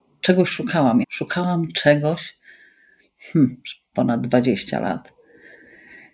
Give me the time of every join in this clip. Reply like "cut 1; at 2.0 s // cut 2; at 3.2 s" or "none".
cut 1; at 1.0 s // cut 2; at 3.9 s